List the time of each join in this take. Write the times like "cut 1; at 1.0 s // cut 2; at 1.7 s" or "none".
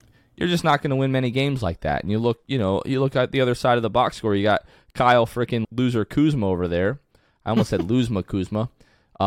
cut 1; at 5.6 s